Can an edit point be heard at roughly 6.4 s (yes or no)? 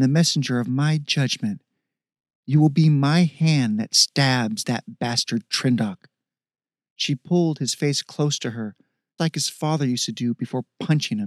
no